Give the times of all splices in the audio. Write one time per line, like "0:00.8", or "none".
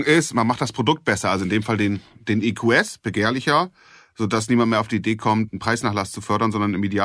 none